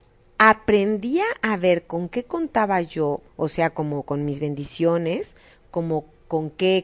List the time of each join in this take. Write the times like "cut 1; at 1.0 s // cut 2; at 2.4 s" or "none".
cut 1; at 3.3 s